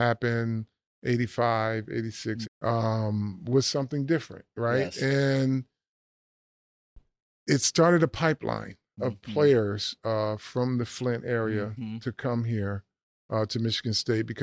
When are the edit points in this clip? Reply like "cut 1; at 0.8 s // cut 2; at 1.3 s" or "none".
cut 1; at 2.4 s